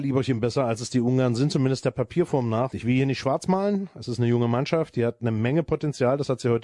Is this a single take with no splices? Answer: no; 1 cut; at 2.7 s

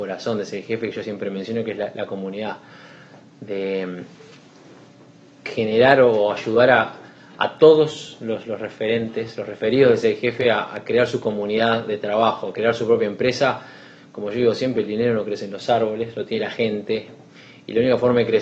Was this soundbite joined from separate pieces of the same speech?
no; 0 cuts

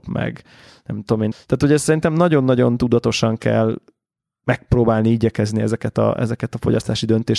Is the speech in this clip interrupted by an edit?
yes; 1 cut; at 1.3 s

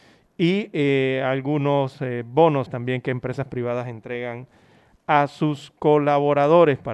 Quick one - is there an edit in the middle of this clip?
yes; 1 cut; at 2.7 s

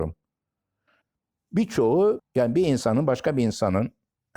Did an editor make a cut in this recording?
yes; 1 cut; at 2.2 s

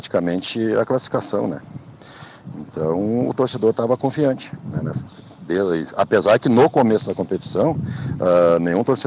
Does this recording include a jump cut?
no; 0 cuts

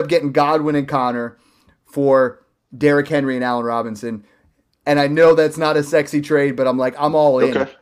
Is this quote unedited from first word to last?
yes; 0 cuts

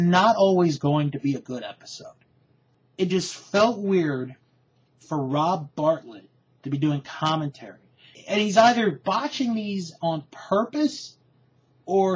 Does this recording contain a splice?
no; 0 cuts

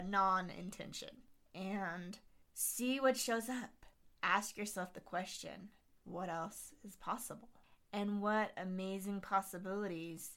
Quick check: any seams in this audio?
no; 0 cuts

